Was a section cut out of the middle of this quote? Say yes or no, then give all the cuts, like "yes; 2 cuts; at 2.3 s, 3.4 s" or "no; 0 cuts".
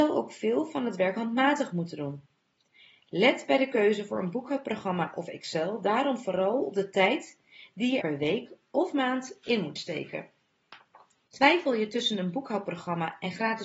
yes; 2 cuts; at 8.0 s, 11.3 s